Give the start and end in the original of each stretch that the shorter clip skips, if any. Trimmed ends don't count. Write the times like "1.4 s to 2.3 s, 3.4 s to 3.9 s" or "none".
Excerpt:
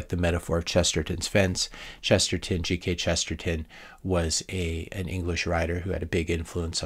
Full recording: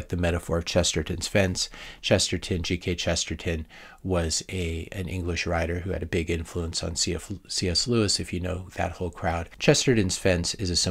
none